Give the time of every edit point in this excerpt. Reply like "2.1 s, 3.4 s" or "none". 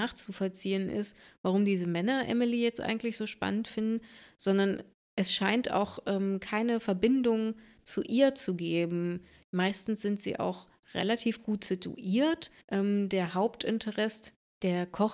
9.4 s, 12.6 s